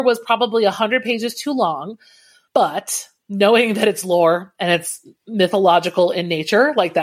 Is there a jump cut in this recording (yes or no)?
no